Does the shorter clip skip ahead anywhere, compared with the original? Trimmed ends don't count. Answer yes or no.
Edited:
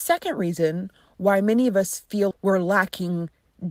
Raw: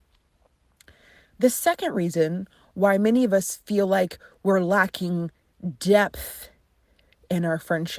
yes